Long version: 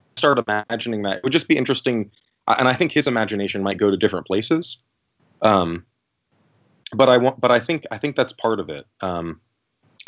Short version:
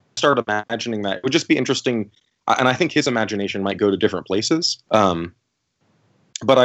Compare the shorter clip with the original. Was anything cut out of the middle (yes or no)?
yes